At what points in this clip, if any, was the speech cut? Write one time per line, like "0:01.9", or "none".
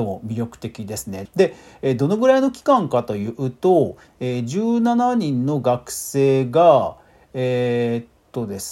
0:01.3